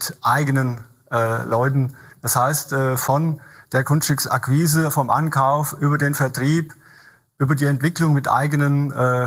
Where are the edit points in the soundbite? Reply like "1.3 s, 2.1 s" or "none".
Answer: 2.1 s